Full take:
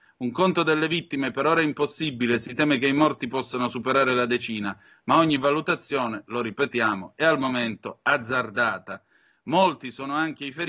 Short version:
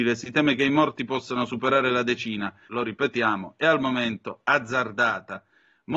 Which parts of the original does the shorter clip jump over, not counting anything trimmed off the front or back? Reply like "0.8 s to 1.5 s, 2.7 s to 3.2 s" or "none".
4.9 s to 6.3 s